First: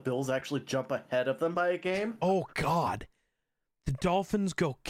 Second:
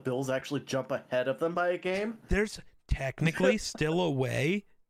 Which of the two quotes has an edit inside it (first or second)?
first